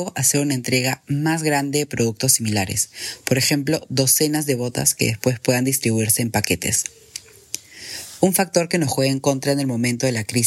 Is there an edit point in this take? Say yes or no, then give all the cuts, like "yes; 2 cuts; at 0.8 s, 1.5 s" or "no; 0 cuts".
no; 0 cuts